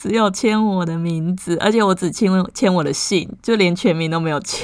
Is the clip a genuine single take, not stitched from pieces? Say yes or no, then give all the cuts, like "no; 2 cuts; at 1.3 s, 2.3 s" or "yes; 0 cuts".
yes; 0 cuts